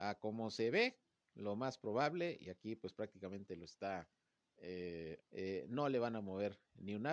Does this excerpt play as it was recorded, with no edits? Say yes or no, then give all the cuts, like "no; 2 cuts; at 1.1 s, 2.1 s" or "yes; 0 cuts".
no; 1 cut; at 5.2 s